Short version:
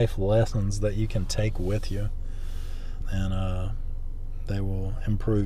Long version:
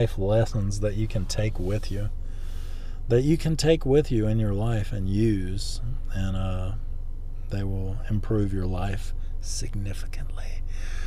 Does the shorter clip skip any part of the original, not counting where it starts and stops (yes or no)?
yes